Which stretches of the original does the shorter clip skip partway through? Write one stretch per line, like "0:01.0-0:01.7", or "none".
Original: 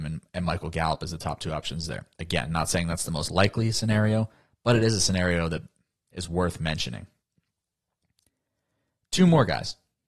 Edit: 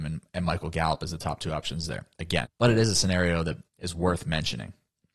0:02.4-0:04.5
0:05.7-0:06.0

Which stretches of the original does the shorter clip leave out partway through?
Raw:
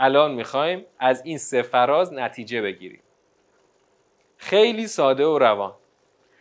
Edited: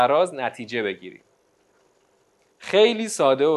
none

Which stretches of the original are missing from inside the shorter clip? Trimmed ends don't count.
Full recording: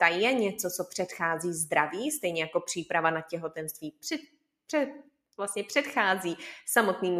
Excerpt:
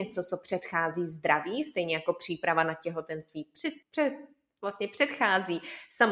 0:04.3-0:04.6

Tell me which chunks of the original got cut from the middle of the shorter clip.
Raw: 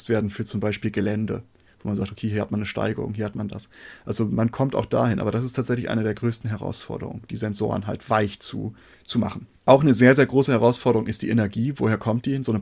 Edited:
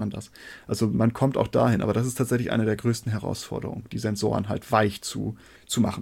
none

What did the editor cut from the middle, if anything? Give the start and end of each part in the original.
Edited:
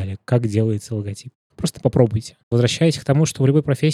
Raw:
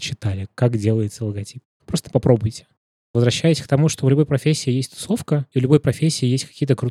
0:02.7-0:03.1

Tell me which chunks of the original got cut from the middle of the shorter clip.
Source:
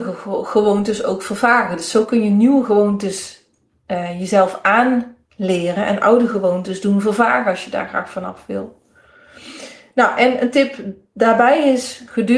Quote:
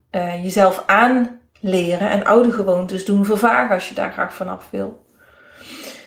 none

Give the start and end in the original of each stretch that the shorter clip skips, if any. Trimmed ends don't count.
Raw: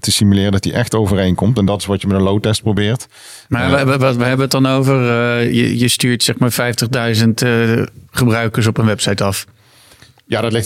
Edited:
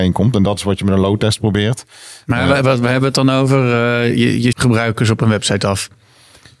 0:03.8-0:04.0
0:05.9-0:08.1

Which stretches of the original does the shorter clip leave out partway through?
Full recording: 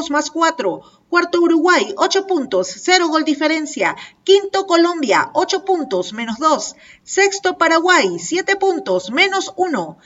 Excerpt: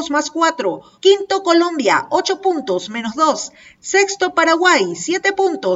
0:01.0-0:04.2

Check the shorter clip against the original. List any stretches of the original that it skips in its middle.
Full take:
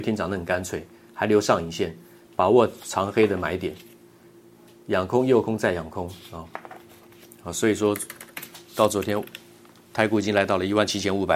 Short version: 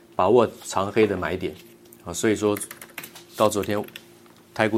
0:04.1-0:07.2

